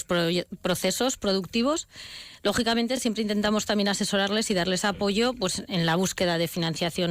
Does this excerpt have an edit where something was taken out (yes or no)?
no